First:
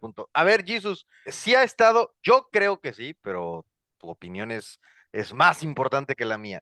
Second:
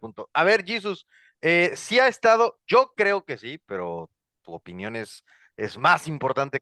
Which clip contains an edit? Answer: first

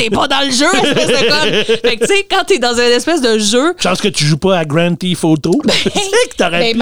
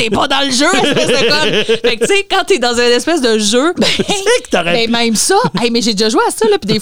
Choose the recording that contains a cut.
second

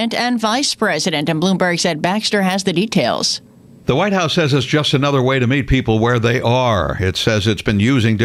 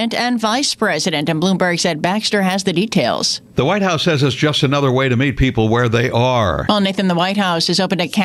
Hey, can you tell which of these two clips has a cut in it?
second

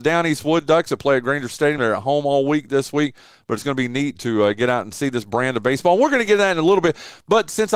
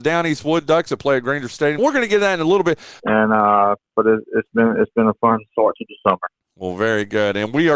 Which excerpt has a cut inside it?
second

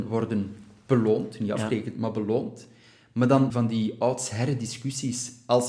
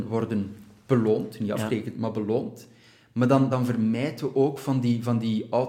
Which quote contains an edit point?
first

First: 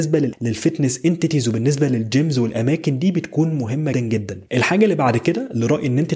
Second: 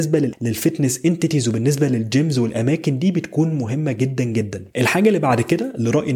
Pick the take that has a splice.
first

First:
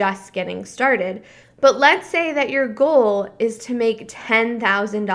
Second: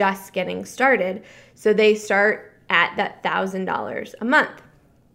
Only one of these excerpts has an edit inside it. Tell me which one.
first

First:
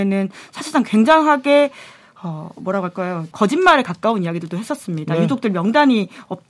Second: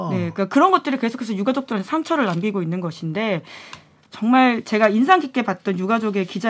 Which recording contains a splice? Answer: first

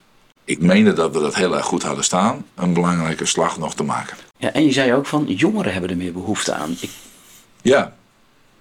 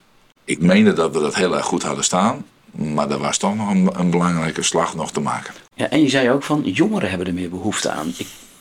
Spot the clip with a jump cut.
first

